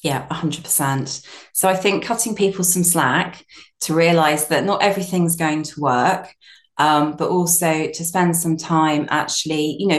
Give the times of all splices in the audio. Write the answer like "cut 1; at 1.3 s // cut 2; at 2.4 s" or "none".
none